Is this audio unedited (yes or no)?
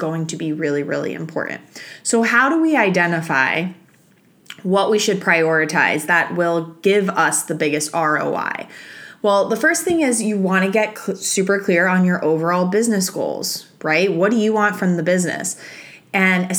yes